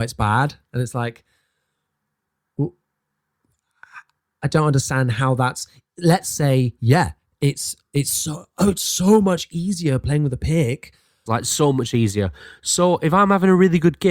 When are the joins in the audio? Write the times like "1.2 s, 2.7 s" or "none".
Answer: 11.3 s